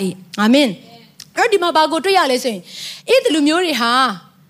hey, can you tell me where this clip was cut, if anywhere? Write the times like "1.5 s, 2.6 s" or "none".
3.3 s